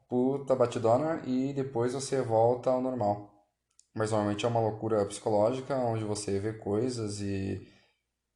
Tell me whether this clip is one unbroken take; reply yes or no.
yes